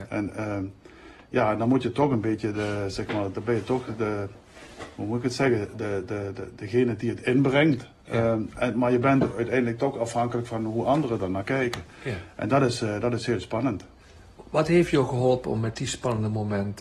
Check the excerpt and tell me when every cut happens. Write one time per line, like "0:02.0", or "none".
none